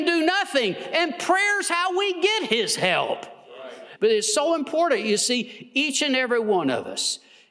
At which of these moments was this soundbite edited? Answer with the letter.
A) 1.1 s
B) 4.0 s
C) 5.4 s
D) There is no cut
B